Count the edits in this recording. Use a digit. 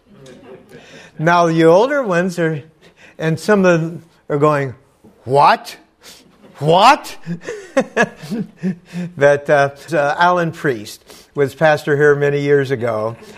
1